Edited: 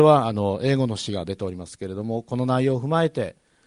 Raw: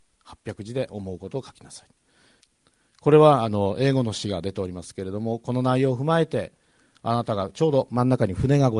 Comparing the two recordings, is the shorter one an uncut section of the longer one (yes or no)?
yes